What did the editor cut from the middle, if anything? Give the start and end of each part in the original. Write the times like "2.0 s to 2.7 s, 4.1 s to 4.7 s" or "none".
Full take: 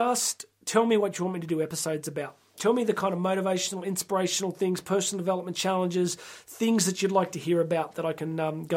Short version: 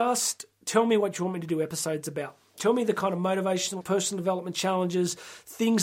3.8 s to 4.8 s